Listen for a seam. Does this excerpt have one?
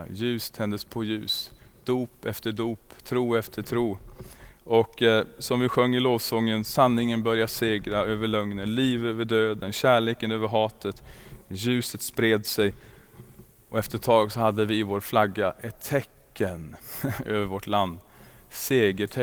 no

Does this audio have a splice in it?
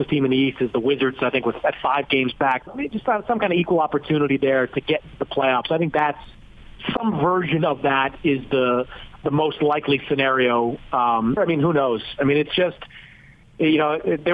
yes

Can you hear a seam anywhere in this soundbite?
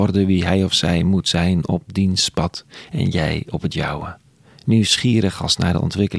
no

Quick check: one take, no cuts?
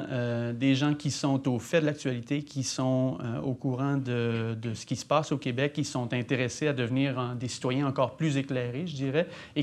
yes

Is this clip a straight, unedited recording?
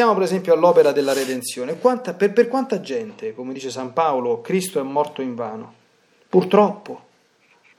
yes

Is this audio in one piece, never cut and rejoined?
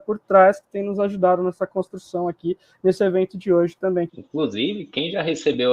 no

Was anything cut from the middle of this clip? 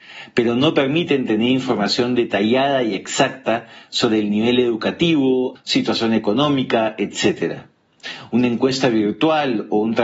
yes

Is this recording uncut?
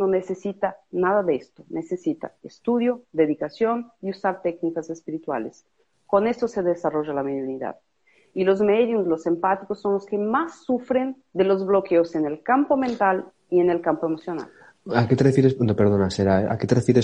yes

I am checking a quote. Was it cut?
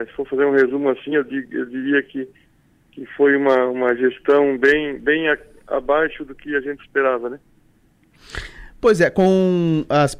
no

